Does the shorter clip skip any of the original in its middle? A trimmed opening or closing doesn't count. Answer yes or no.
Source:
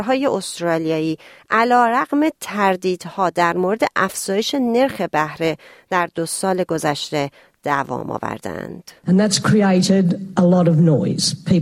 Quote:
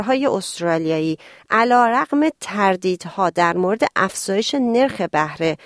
no